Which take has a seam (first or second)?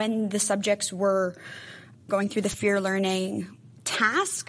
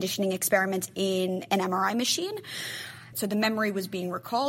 second